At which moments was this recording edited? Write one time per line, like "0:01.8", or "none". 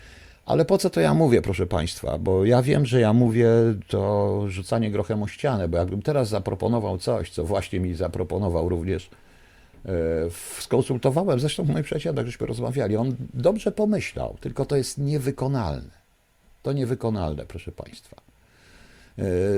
none

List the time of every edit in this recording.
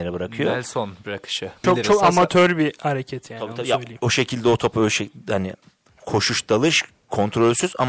0:01.6

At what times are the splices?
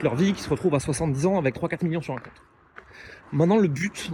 0:03.2

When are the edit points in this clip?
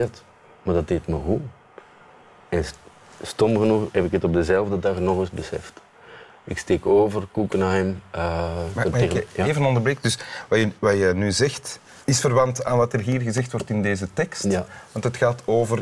0:12.0

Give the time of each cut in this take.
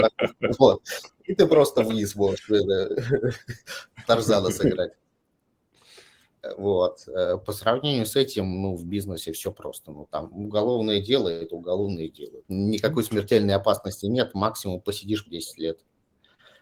0:12.4
0:15.3

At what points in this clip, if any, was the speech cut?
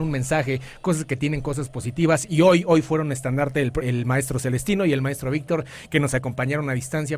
0:03.8

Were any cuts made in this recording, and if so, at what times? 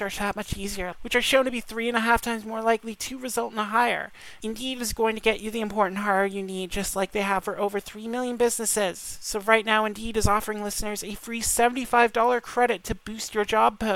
0:00.9
0:04.4

